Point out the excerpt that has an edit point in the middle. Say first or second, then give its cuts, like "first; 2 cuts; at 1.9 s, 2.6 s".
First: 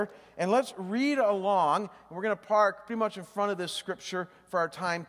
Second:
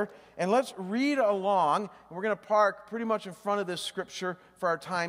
first; 1 cut; at 2.9 s